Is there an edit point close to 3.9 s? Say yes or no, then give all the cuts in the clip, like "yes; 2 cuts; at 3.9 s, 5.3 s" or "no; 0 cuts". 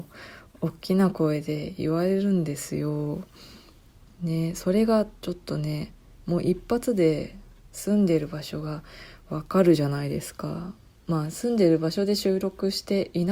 no; 0 cuts